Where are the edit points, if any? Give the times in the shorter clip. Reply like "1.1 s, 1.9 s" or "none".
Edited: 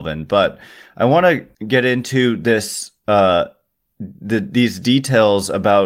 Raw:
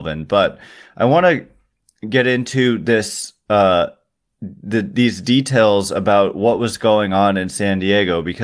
1.5 s